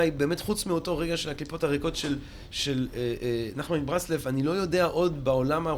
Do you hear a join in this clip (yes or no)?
no